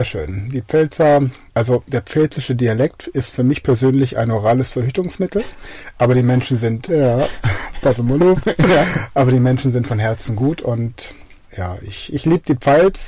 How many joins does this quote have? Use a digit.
1